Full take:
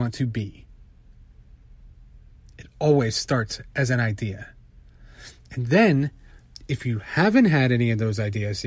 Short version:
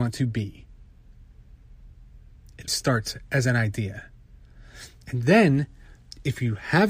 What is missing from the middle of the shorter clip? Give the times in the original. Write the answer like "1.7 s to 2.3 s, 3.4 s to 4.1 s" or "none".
2.7 s to 3.1 s